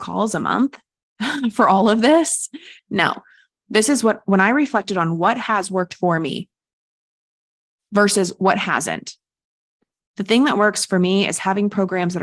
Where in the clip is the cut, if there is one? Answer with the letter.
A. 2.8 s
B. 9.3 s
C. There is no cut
A